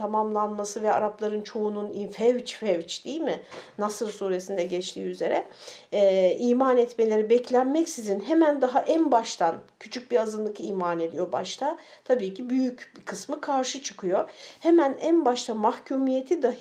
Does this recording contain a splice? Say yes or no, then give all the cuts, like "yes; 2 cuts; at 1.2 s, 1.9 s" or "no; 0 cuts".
no; 0 cuts